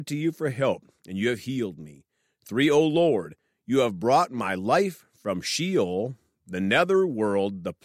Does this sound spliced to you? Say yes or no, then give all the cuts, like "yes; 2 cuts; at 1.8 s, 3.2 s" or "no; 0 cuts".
no; 0 cuts